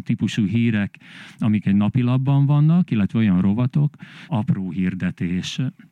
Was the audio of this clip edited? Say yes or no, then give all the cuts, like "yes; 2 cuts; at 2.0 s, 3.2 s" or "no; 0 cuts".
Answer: yes; 1 cut; at 4.3 s